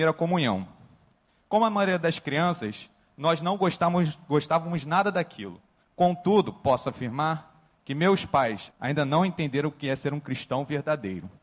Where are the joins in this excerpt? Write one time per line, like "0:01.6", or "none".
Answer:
0:05.8
0:08.7